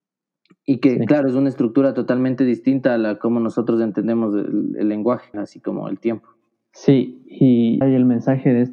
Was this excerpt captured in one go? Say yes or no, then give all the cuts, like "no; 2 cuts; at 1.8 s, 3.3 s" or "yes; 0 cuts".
no; 2 cuts; at 5.3 s, 7.8 s